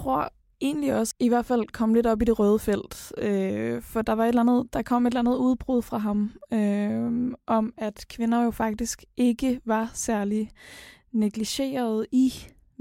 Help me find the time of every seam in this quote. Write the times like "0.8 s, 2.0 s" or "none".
1.1 s

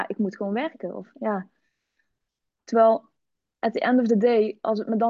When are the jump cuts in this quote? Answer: none

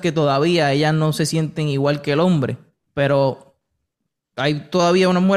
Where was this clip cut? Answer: 2.8 s

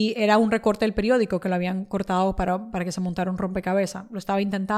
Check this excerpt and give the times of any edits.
none

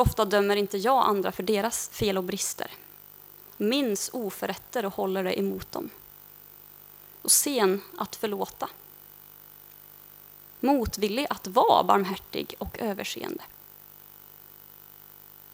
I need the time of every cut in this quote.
none

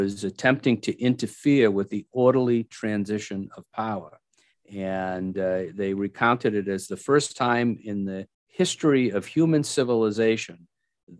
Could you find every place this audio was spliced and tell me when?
4.5 s, 8.3 s

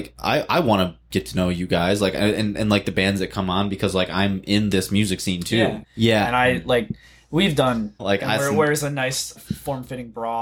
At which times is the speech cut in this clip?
5.8 s, 8.0 s, 9.4 s

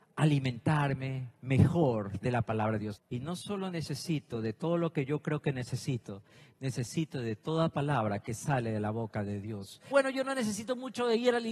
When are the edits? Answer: 1.3 s, 2.9 s, 9.9 s

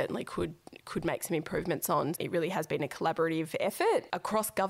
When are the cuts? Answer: 2.1 s

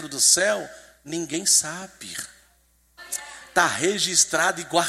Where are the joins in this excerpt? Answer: none

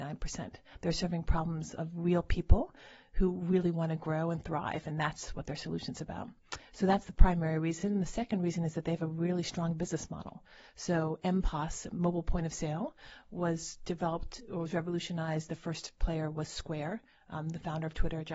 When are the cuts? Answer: none

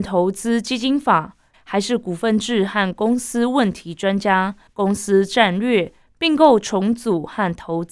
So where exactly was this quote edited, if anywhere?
1.5 s, 4.7 s

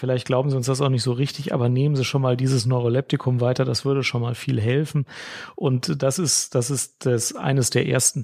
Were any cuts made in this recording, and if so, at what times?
none

